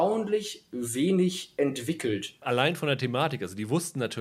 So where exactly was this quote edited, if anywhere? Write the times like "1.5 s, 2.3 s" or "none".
2.4 s